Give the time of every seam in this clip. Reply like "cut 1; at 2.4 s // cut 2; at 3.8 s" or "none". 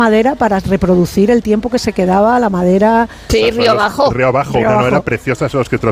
cut 1; at 3.3 s